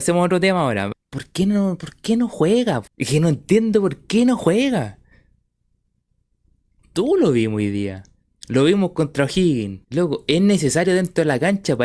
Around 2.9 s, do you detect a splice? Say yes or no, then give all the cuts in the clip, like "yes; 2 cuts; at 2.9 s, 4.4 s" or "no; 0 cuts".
yes; 3 cuts; at 0.9 s, 2.9 s, 9.8 s